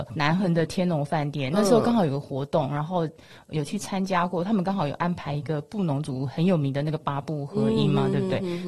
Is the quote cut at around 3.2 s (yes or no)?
no